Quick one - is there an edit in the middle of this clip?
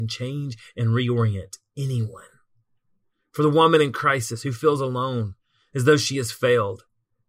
no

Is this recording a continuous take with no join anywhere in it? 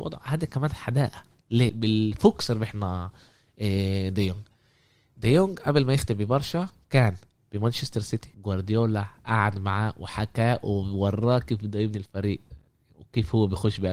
no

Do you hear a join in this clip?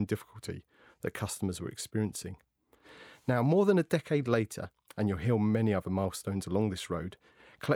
no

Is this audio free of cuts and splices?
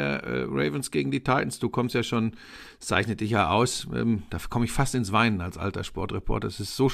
yes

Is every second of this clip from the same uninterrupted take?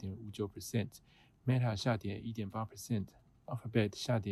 yes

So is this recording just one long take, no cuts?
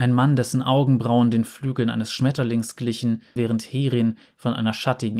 no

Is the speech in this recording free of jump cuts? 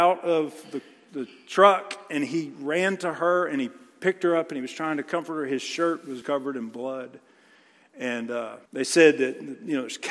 no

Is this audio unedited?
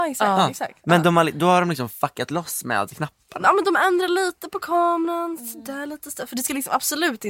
yes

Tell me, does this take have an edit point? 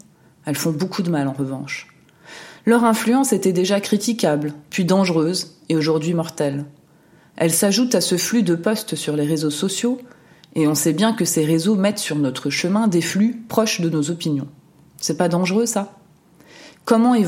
no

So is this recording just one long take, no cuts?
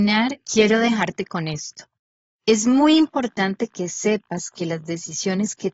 yes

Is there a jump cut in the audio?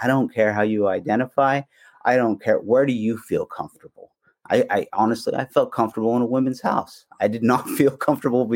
no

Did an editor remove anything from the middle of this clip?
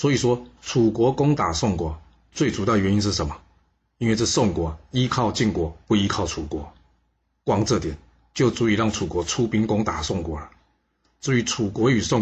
no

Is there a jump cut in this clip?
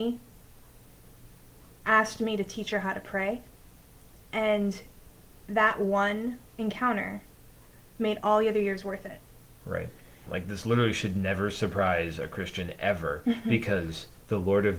yes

